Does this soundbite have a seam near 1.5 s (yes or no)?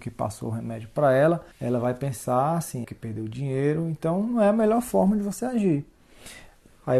yes